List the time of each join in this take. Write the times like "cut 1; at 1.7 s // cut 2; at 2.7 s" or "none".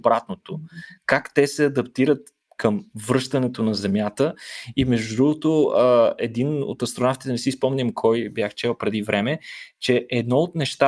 none